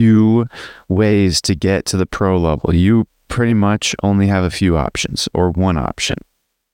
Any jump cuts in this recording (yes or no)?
no